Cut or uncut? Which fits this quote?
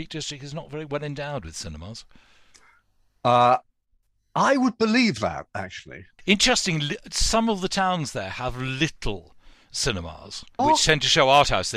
cut